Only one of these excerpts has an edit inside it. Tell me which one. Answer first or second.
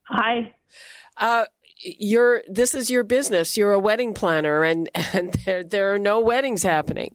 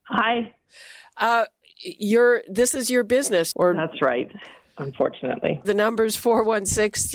second